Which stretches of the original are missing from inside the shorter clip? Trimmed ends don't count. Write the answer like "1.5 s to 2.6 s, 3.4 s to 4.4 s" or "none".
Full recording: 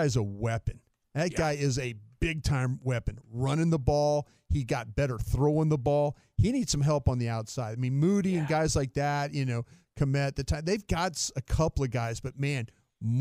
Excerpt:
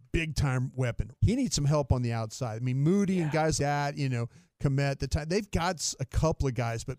3.2 s to 6.3 s, 8.7 s to 8.9 s